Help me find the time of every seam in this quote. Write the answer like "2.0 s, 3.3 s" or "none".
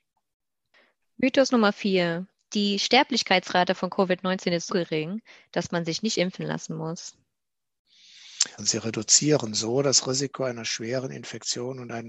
4.7 s, 8.6 s